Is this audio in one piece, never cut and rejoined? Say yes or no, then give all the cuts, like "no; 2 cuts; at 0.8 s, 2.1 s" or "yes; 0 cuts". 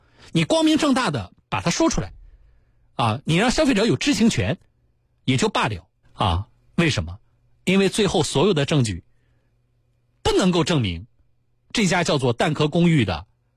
no; 1 cut; at 6.0 s